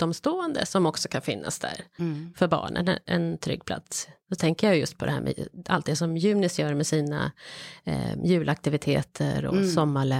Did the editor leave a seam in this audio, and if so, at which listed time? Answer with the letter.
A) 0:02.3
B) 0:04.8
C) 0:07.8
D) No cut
D